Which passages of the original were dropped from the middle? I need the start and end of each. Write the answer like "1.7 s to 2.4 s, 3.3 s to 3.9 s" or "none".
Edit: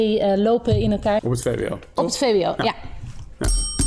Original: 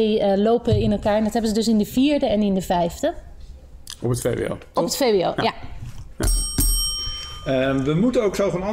1.2 s to 4.0 s